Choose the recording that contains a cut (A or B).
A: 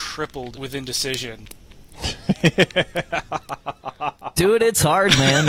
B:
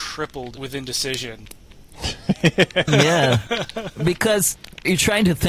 B